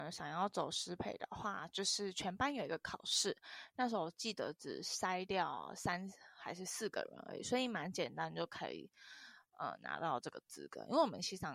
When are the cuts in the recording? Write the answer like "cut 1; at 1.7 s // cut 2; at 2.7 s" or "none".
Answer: none